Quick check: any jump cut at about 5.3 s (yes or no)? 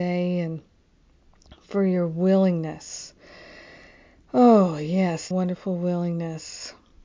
yes